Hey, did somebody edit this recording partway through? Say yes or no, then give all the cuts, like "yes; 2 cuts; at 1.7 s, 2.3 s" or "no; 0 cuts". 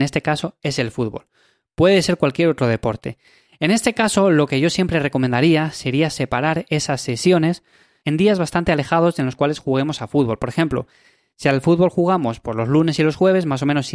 no; 0 cuts